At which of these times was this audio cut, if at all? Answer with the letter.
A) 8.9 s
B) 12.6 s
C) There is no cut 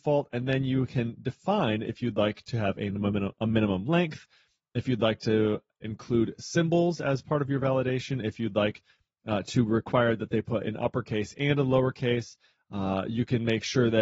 C